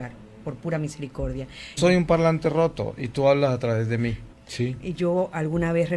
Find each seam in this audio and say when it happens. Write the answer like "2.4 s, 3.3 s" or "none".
1.8 s, 4.3 s